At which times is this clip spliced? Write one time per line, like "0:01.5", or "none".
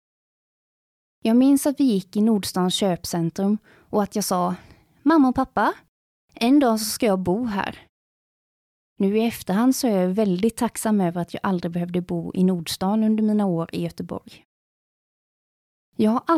none